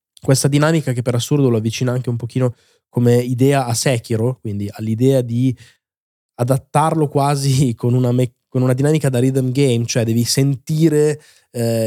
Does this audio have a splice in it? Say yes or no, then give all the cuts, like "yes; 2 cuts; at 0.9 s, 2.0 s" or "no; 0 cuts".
no; 0 cuts